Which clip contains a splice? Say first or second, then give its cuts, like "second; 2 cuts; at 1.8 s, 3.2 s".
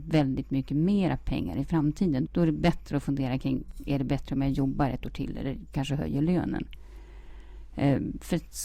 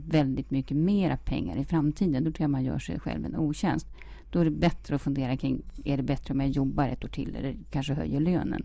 first; 1 cut; at 2.2 s